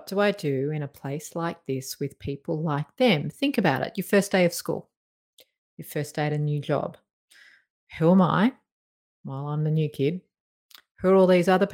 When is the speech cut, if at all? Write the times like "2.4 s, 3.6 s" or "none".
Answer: none